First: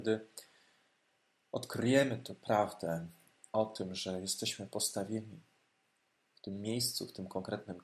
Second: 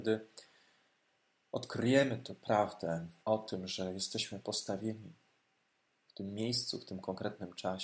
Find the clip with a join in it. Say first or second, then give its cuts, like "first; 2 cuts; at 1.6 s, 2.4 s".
second; 1 cut; at 3.2 s